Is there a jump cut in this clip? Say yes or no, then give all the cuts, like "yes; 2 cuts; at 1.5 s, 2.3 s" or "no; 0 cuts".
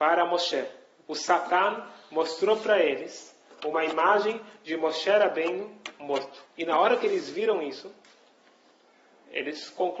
yes; 2 cuts; at 1.0 s, 6.5 s